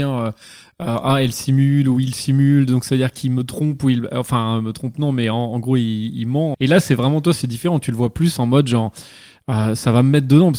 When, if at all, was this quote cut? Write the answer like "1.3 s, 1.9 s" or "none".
6.5 s